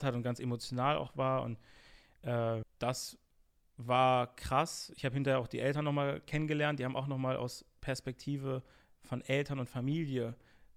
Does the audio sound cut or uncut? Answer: cut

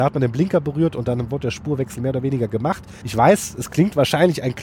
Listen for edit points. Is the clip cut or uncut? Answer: cut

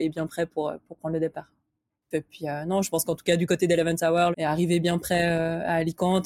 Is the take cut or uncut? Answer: cut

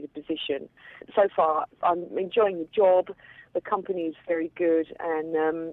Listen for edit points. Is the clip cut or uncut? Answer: uncut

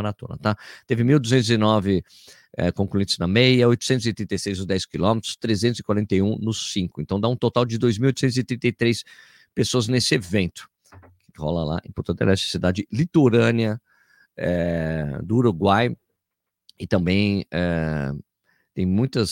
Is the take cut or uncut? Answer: uncut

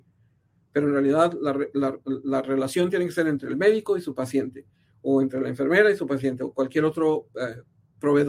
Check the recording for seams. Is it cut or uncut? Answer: uncut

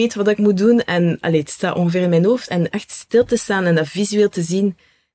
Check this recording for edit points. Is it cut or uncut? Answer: uncut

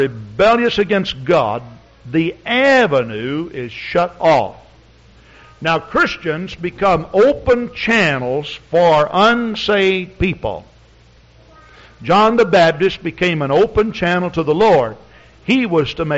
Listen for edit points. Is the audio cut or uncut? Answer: uncut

